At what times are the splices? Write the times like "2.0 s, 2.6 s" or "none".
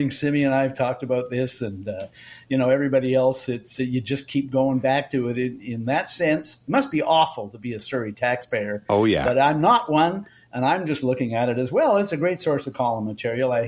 none